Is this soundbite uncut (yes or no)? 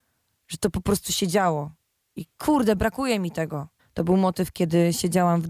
no